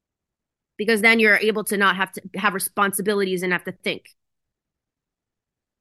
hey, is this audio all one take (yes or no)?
yes